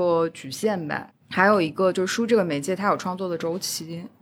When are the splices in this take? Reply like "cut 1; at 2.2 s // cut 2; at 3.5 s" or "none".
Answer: cut 1; at 1.1 s